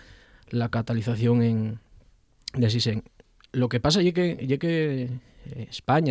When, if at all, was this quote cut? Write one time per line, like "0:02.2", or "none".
none

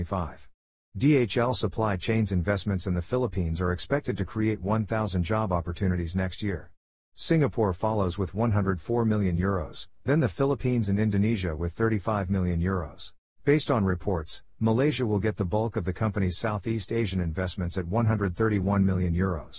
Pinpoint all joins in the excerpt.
0:07.1
0:13.3

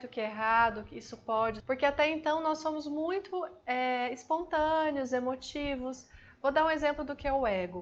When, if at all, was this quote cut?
0:01.6

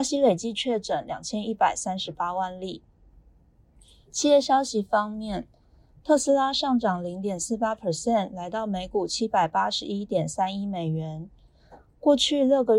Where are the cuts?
none

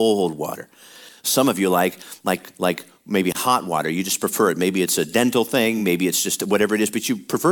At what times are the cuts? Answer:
none

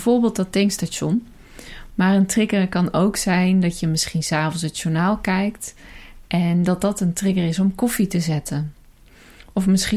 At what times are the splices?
0:01.9

